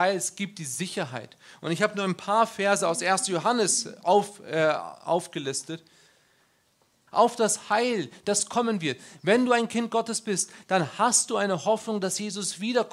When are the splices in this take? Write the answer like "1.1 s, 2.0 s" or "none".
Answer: 7.1 s